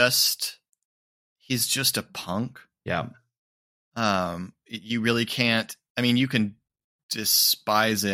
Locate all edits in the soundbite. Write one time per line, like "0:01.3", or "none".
none